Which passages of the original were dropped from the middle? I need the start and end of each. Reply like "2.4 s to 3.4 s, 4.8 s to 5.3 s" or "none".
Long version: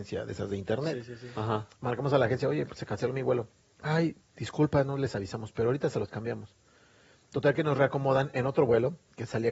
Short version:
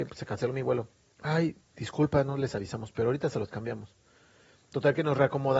none